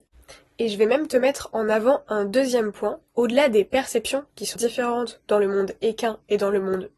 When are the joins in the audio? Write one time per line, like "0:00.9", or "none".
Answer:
0:04.6